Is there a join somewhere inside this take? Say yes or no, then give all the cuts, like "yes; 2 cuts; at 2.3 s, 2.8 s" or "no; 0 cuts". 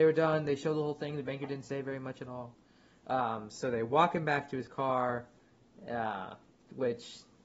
no; 0 cuts